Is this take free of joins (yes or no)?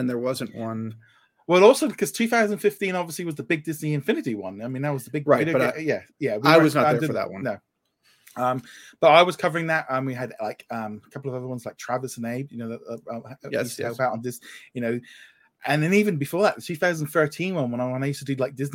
yes